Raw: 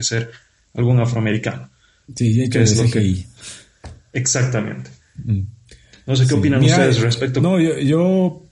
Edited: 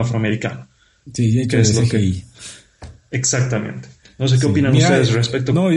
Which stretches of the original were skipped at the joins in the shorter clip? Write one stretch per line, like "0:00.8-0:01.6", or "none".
0:05.0-0:05.9